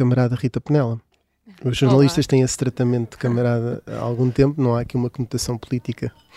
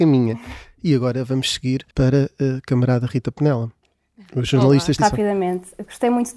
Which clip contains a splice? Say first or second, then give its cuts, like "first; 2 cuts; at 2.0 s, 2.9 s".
second; 2 cuts; at 1.9 s, 5.0 s